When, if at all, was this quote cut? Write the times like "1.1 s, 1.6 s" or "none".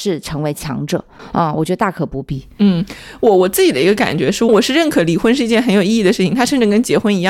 none